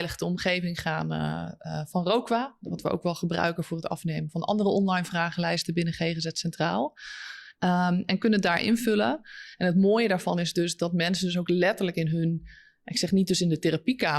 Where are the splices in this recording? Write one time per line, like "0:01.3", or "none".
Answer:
none

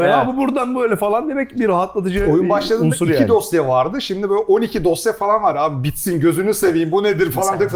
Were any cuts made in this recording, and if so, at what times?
none

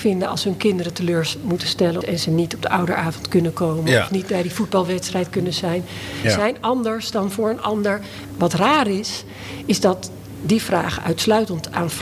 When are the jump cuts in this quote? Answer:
0:02.0
0:06.2
0:08.3

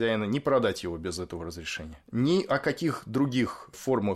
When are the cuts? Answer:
0:02.0

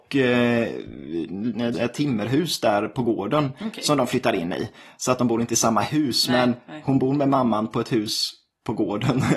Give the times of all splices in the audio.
0:01.7

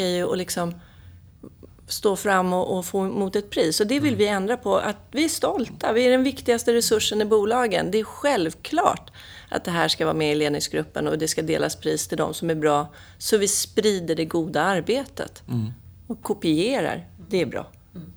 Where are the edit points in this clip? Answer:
none

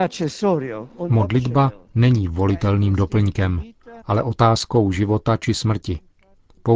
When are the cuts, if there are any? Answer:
0:04.0

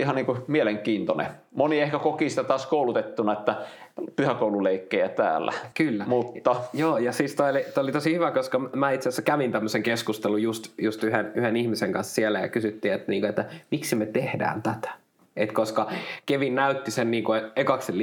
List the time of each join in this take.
none

